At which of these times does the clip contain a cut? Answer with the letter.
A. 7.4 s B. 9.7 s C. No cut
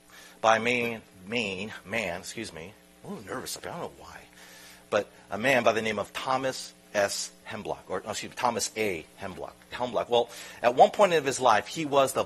B